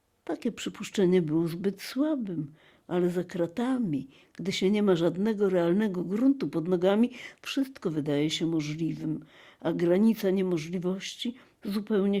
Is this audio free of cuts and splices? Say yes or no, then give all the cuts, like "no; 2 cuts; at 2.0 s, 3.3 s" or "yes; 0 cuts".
yes; 0 cuts